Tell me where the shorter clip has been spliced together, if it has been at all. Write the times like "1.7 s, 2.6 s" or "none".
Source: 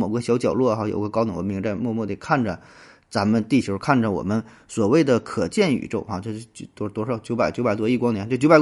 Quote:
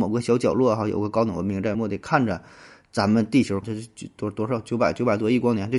1.7 s, 3.6 s